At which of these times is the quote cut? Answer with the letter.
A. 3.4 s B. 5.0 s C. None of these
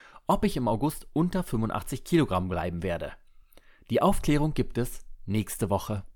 C